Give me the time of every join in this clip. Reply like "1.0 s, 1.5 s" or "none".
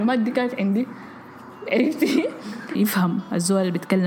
2.7 s